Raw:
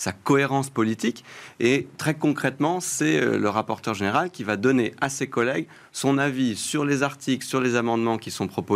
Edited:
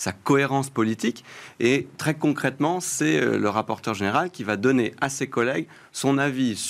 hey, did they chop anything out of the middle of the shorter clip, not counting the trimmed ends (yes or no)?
no